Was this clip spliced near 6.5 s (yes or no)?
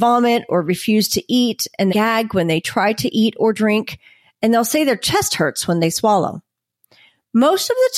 no